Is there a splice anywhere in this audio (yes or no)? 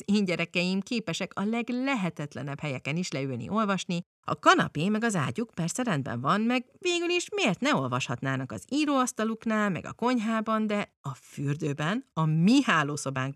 no